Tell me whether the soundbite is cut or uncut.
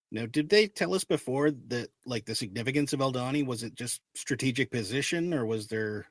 uncut